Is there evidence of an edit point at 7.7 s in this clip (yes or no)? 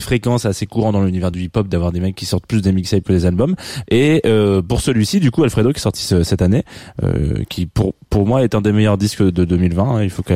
no